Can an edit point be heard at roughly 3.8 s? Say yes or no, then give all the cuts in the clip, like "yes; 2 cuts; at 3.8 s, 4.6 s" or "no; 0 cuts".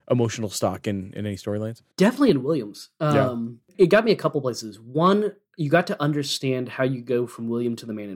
no; 1 cut; at 1.9 s